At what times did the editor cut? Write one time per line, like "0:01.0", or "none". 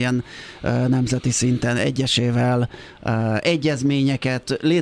none